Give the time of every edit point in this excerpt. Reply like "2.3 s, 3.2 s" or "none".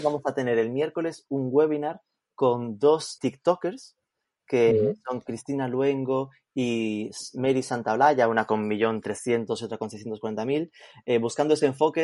3.2 s